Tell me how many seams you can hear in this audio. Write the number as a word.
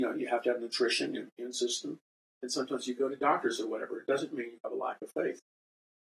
zero